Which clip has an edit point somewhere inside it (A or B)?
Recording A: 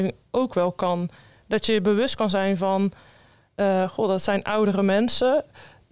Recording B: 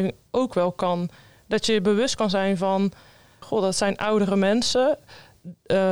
B